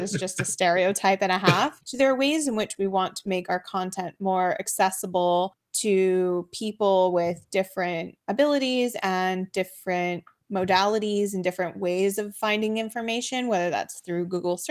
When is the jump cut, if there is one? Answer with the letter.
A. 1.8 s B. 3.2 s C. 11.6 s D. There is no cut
A